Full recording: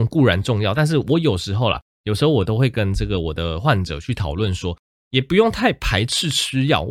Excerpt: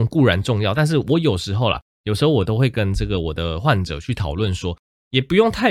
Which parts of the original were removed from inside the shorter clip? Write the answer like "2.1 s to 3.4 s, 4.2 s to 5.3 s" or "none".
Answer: none